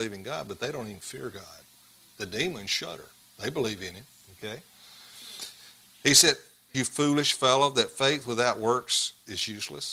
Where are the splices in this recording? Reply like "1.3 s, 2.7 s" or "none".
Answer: 6.7 s